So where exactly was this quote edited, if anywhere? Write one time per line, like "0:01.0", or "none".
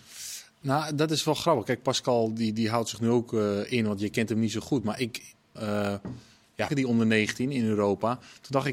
0:05.6
0:06.7